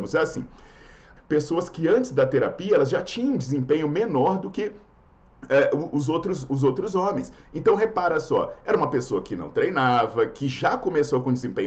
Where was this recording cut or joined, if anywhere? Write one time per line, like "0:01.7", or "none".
0:01.2